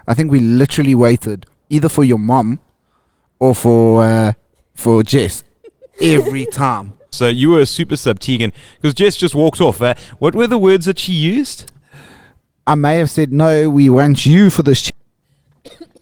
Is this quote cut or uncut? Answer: cut